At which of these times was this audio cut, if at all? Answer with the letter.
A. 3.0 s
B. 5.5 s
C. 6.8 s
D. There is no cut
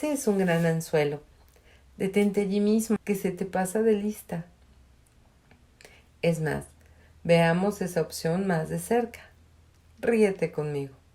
A